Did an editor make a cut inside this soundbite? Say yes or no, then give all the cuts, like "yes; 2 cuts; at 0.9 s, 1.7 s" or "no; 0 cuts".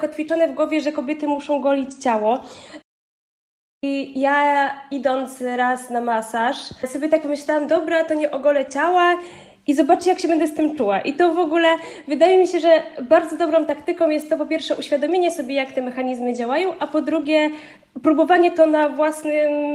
no; 0 cuts